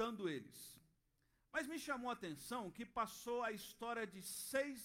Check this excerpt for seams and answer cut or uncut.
uncut